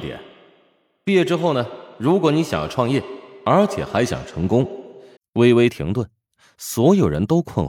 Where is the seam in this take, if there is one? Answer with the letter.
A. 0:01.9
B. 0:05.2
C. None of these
B